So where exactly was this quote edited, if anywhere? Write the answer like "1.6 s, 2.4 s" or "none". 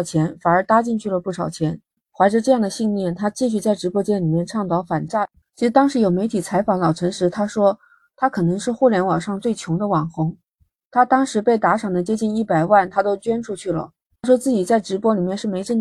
2.0 s